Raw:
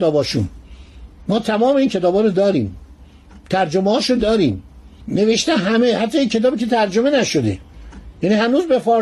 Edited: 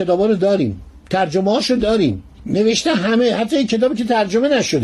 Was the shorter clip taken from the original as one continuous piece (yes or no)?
no